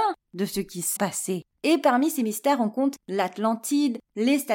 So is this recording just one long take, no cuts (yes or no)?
no